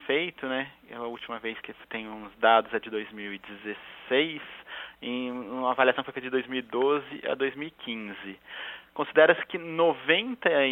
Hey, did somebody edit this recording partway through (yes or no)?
no